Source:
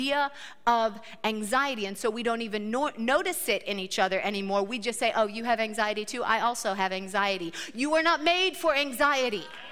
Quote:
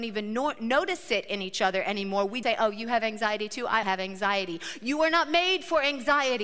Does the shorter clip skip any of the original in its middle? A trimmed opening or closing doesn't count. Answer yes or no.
yes